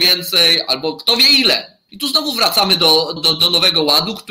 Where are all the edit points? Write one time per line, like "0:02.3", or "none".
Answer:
0:01.9
0:03.2